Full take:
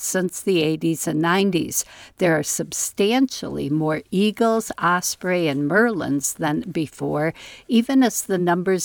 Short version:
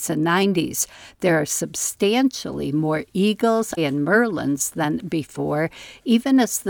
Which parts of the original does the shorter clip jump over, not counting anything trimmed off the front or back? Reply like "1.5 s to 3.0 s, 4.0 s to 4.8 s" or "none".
4.7 s to 5.4 s